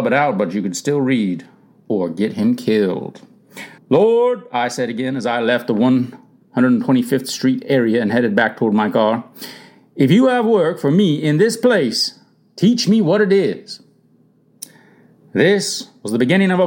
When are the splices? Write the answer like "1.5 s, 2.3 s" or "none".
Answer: 3.8 s